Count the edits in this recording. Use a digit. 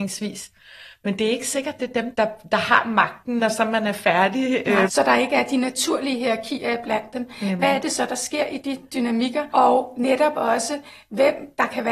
2